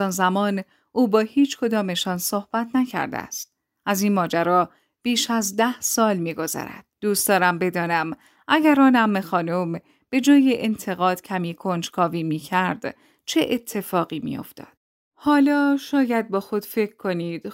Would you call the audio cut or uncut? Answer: cut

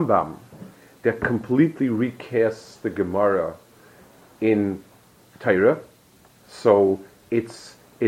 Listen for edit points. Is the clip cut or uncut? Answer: uncut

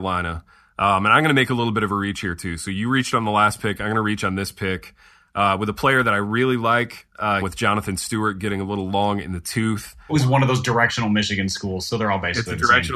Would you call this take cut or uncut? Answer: cut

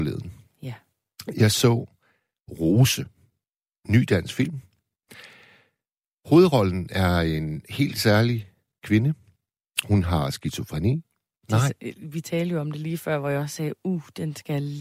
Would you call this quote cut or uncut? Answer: cut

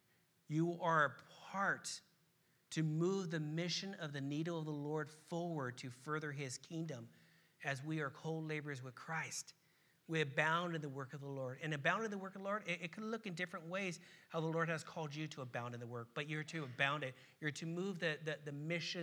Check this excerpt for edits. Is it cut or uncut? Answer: uncut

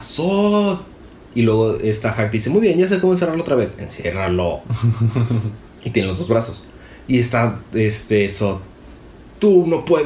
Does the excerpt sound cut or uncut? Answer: cut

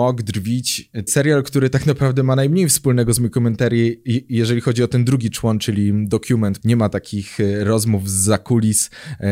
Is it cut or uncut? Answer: cut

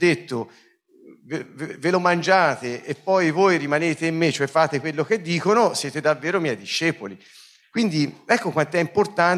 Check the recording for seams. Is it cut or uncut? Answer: uncut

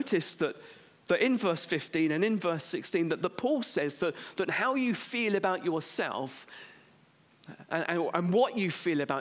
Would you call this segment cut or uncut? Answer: uncut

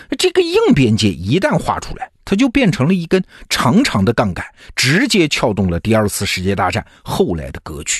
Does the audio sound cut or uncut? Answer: uncut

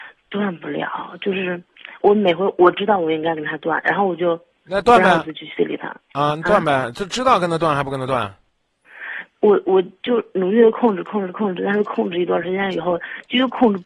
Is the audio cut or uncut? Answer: cut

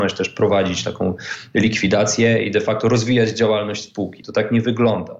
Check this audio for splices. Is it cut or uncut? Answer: uncut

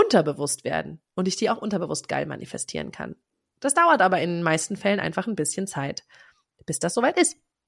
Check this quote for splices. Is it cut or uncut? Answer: uncut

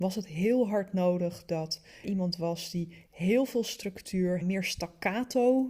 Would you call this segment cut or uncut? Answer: cut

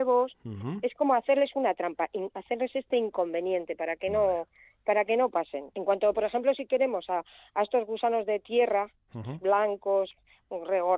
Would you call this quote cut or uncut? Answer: cut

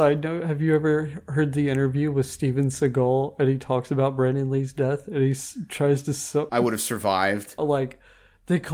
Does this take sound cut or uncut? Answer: cut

